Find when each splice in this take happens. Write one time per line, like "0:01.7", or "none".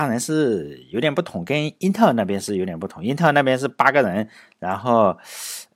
none